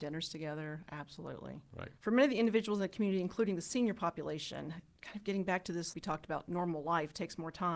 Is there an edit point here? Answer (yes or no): yes